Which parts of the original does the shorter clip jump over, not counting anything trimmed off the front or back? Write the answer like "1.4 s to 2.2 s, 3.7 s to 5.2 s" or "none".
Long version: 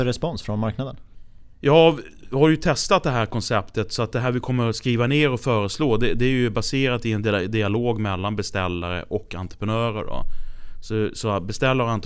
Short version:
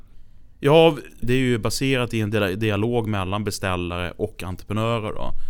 2.2 s to 6.1 s